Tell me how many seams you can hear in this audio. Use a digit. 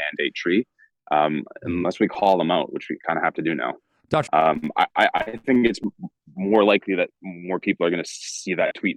1